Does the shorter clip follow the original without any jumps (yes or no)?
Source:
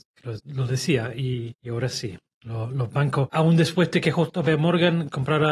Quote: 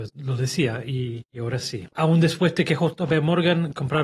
no